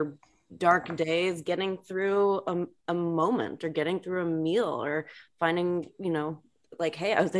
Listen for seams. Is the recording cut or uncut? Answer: uncut